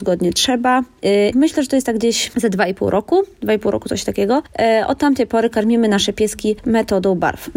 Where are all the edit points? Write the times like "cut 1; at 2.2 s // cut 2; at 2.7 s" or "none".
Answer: cut 1; at 1.3 s